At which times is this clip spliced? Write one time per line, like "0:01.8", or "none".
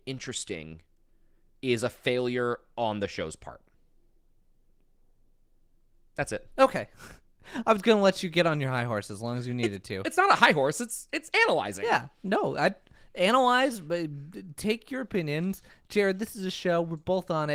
none